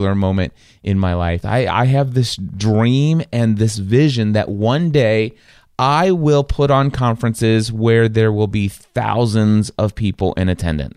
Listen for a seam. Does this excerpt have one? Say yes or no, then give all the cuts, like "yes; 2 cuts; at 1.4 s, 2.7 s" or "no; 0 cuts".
yes; 1 cut; at 1.4 s